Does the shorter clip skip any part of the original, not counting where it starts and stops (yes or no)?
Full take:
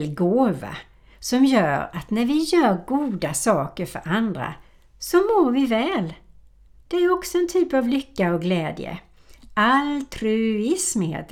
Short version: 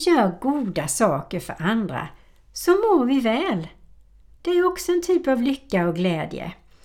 no